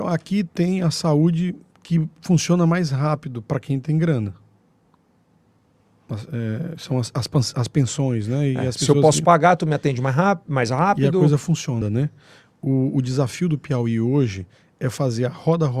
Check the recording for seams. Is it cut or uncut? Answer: cut